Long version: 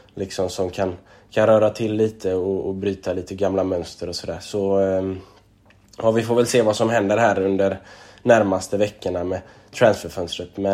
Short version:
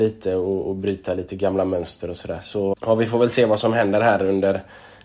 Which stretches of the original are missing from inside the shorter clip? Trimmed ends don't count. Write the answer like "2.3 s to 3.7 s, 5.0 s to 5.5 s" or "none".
4.7 s to 5.9 s